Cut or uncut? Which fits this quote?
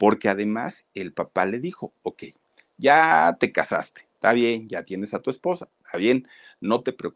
uncut